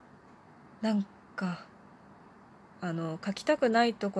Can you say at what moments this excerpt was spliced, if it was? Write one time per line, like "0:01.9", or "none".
0:02.7